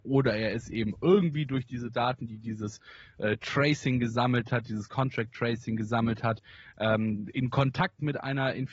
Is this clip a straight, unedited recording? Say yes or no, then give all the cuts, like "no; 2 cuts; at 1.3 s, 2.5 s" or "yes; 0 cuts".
yes; 0 cuts